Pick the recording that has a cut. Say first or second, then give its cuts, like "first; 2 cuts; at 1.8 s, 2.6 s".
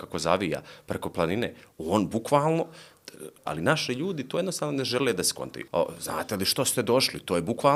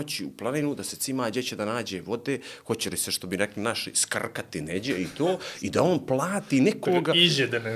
first; 2 cuts; at 3.5 s, 5.7 s